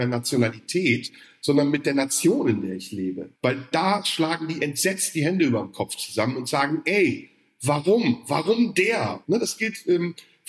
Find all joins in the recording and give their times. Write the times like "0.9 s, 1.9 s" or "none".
3.3 s, 9.2 s